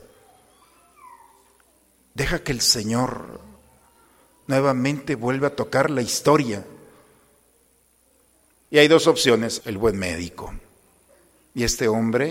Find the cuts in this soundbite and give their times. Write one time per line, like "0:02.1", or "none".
0:08.5
0:09.6